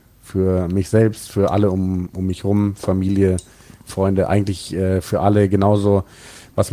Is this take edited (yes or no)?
no